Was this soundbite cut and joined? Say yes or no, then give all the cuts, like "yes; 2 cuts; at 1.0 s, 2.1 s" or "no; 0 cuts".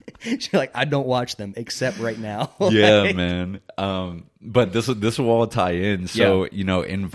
no; 0 cuts